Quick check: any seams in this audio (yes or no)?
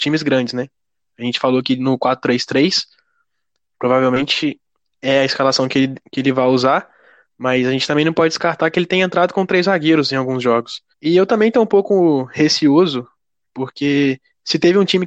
yes